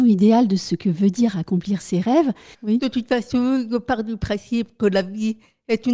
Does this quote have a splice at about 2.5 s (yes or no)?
yes